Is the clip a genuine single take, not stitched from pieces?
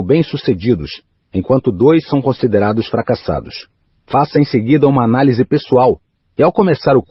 no; 1 cut; at 4.0 s

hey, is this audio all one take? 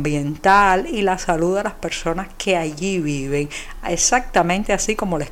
yes; 0 cuts

